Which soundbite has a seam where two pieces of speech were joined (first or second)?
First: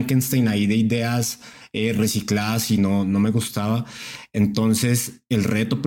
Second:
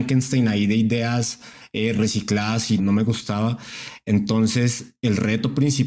second